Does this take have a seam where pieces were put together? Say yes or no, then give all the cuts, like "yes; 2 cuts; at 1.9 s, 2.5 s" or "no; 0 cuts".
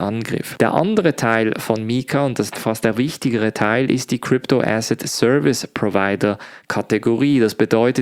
no; 0 cuts